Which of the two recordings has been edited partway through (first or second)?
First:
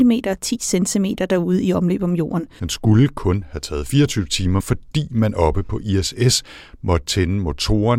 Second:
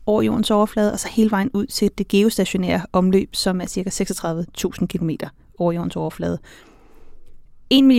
first